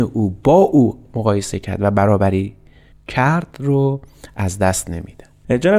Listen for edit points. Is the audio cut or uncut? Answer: uncut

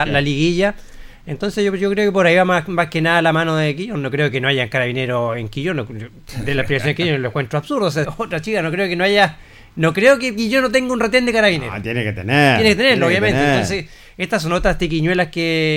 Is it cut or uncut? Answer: cut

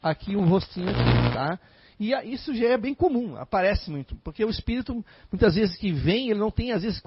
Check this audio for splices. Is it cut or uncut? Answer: uncut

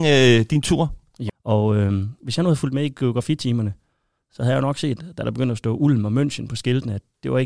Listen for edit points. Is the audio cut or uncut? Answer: cut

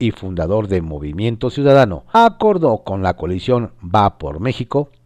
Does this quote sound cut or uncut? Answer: cut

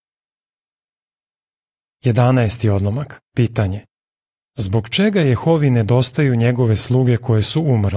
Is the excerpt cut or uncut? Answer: uncut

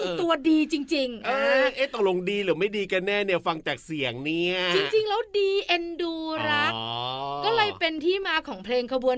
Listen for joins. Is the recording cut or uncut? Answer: uncut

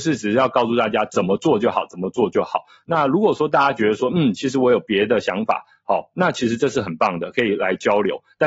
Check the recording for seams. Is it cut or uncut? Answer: uncut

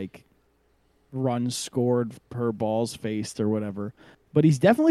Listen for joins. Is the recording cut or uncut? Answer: uncut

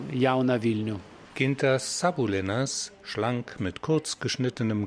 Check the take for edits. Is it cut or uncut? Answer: cut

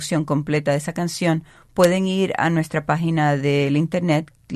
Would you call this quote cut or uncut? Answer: uncut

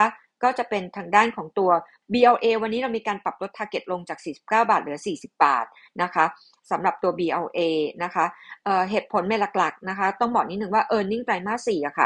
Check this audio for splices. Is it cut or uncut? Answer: cut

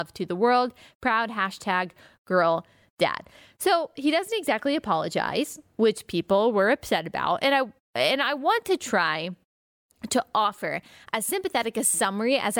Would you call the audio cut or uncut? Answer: uncut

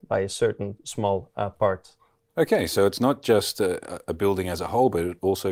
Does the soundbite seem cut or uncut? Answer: cut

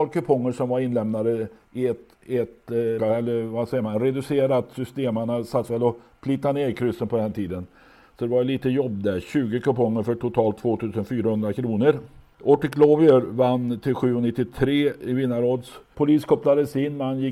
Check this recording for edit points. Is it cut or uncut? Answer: cut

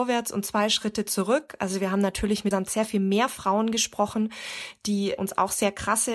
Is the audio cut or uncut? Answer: cut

